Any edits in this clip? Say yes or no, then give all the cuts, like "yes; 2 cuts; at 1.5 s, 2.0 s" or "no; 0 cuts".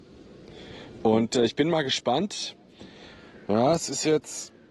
no; 0 cuts